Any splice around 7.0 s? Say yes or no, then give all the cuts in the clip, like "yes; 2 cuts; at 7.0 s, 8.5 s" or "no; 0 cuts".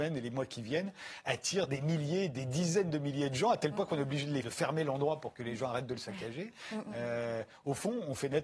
no; 1 cut; at 4.4 s